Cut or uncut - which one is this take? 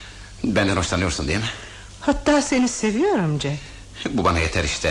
uncut